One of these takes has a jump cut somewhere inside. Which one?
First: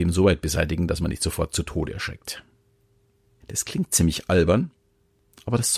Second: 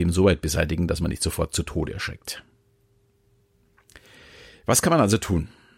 first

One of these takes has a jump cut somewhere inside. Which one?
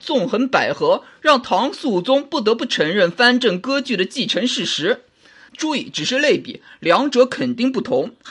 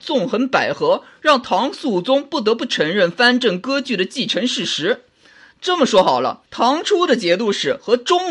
first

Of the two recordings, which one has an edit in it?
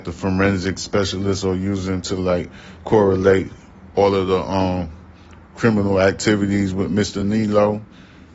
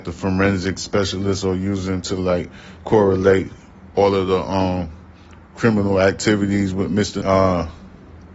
second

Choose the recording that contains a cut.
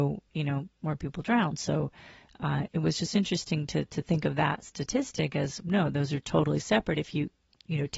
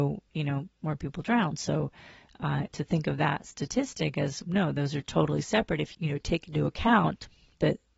second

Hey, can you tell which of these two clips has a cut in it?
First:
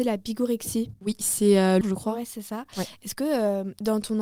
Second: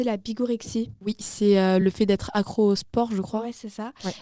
first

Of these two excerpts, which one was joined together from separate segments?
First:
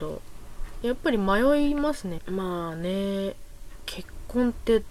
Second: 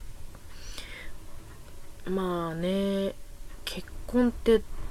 first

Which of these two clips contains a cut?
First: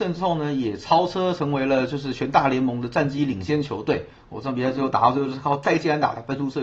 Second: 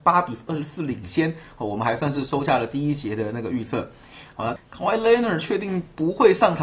second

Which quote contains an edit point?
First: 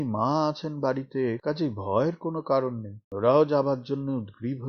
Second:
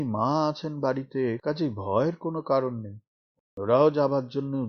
first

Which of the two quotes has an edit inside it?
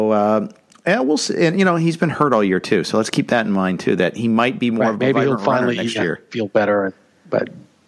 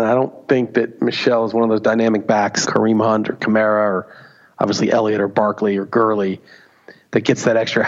second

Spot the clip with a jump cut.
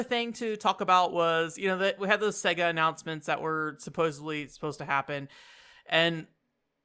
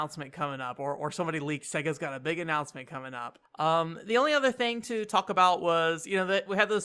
second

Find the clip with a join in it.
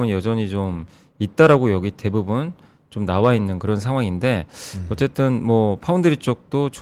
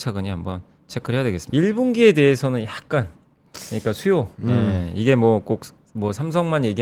second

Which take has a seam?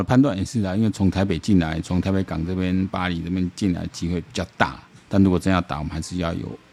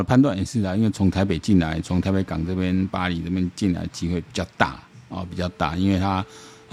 first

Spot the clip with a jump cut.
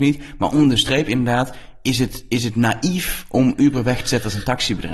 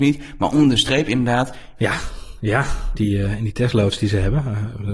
second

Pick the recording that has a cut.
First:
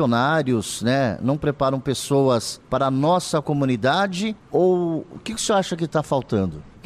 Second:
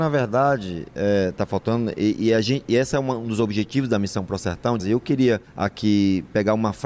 second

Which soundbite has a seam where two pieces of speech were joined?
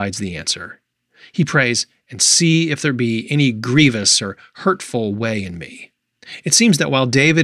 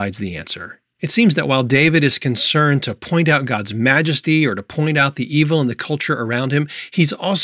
second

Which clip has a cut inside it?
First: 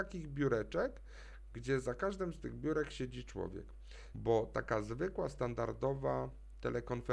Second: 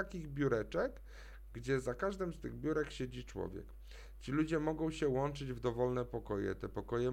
first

